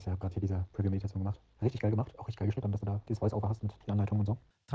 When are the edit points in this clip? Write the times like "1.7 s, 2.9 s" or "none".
1.6 s, 2.6 s